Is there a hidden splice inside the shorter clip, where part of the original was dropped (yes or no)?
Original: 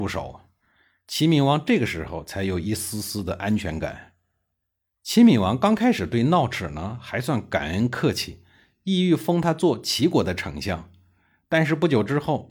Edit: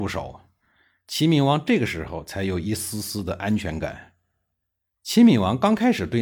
no